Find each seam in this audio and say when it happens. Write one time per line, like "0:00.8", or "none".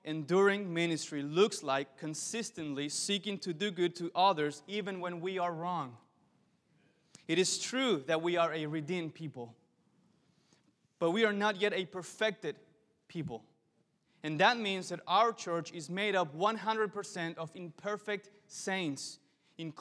none